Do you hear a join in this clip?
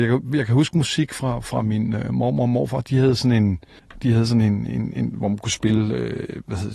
no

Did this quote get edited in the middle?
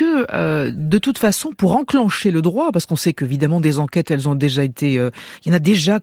no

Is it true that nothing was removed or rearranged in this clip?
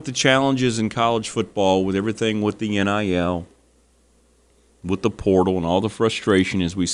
yes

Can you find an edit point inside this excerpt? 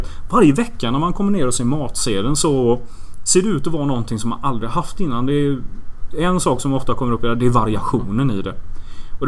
no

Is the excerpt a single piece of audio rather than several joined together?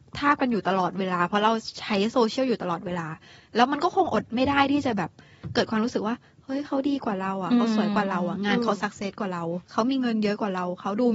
no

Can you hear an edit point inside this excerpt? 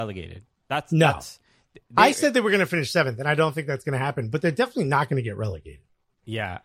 no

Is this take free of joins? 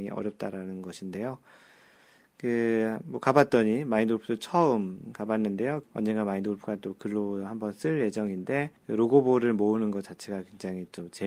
no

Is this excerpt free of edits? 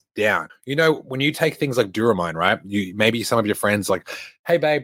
yes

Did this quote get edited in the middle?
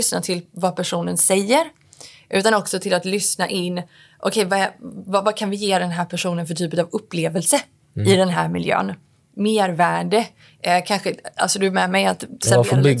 no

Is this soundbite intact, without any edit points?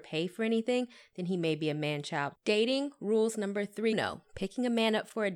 no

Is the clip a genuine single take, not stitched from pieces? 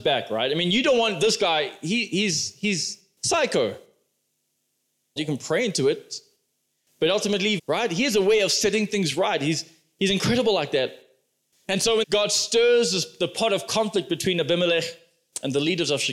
no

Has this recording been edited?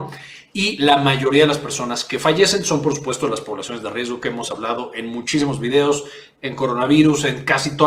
no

